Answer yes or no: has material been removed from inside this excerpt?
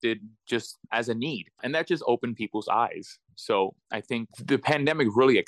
no